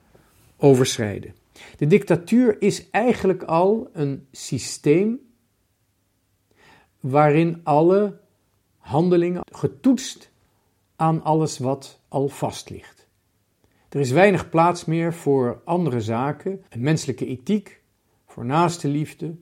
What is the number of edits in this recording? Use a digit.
2